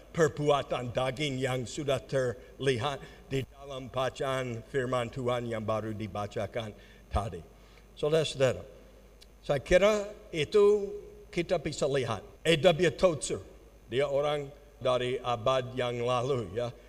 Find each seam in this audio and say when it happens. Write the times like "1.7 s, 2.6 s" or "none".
12.4 s, 14.8 s